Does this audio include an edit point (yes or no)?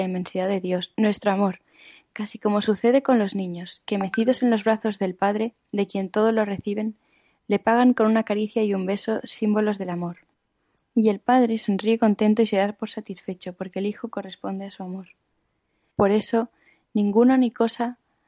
yes